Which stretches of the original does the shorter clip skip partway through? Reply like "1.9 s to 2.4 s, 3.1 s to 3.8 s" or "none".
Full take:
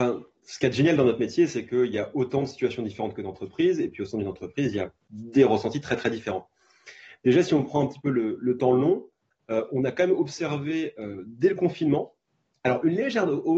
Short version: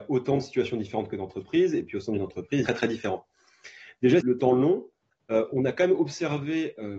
4.7 s to 5.9 s, 7.4 s to 8.4 s